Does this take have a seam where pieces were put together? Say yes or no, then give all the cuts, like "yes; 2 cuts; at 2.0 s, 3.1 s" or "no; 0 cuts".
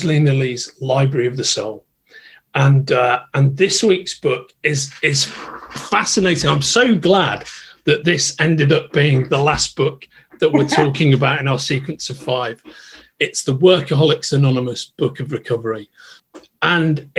no; 0 cuts